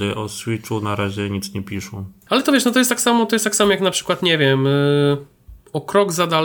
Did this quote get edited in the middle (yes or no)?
yes